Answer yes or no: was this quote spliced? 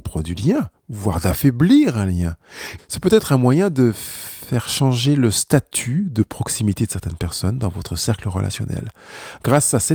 yes